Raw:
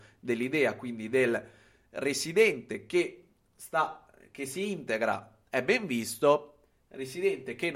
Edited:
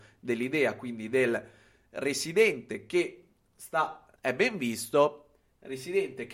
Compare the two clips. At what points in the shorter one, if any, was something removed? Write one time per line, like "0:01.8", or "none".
0:04.2